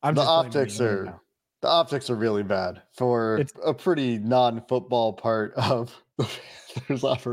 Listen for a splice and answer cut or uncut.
cut